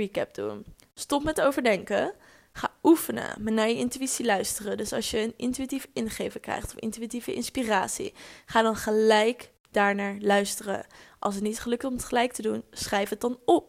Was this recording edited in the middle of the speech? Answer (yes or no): no